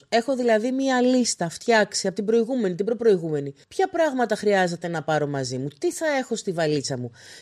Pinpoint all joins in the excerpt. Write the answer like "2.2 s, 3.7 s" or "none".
3.6 s